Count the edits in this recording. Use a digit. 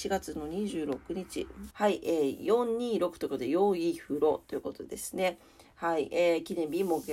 1